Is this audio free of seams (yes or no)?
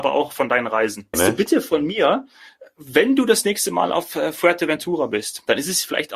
no